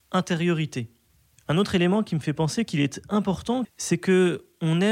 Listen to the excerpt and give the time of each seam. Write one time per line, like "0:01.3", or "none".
0:03.6